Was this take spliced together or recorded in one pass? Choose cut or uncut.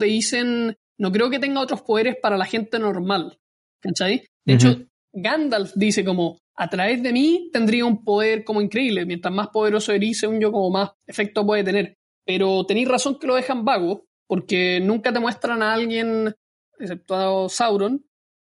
uncut